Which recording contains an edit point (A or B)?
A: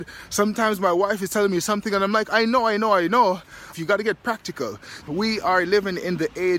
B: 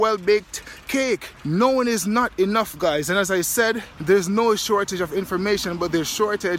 A